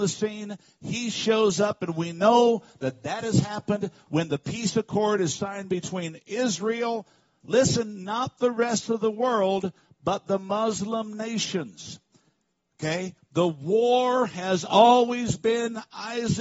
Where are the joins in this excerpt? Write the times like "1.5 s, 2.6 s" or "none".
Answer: none

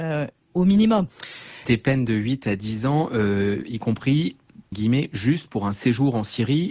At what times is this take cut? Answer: 4.7 s

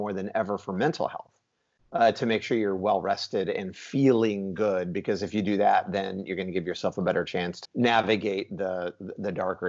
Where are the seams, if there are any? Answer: 7.7 s

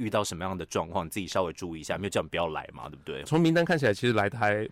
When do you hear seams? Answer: 3.3 s

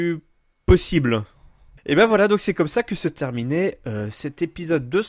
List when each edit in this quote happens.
1.8 s

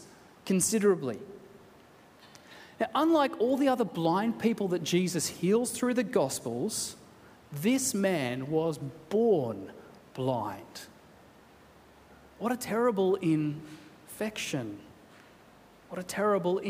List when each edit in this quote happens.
none

